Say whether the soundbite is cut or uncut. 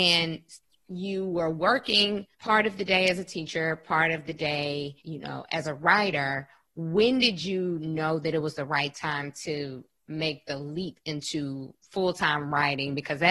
cut